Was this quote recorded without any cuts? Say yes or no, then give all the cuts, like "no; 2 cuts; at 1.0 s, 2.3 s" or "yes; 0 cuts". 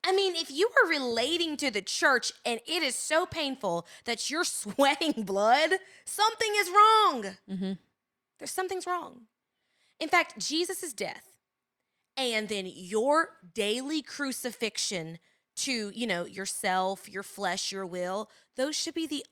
yes; 0 cuts